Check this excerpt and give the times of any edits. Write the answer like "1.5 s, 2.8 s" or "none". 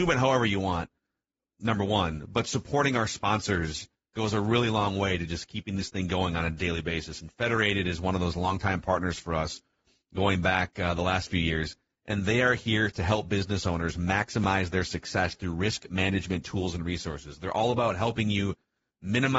none